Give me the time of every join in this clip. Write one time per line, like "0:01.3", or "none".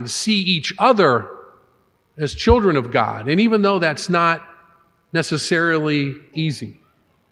0:06.3